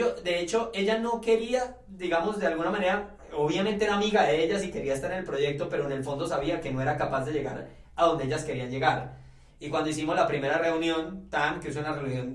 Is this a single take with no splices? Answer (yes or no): no